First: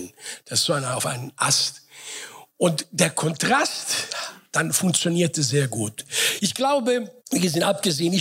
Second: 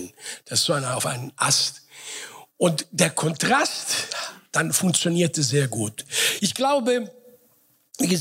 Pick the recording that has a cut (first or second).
first